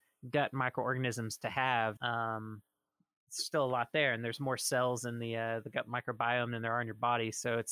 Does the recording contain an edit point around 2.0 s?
yes; 1 cut; at 2.0 s

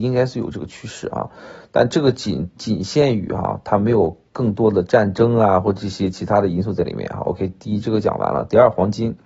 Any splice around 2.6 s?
yes; 1 cut; at 2.6 s

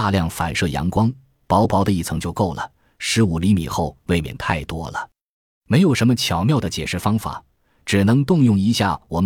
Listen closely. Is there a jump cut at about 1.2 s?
no; 0 cuts

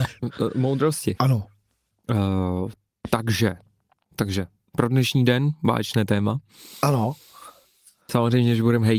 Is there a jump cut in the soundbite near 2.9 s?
no; 1 cut; at 1.2 s

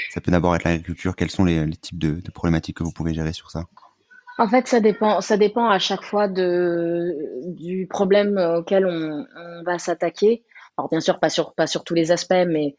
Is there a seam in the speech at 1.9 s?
no; 1 cut; at 10.7 s

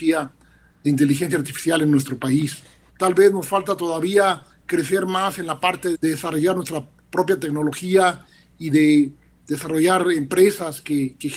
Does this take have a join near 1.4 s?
no; 2 cuts; at 2.9 s, 5.9 s

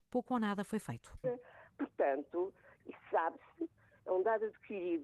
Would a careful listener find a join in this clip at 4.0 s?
no; 2 cuts; at 1.2 s, 2.8 s

